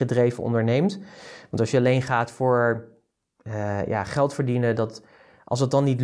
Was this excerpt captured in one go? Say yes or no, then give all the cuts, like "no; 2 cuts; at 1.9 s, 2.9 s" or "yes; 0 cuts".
yes; 0 cuts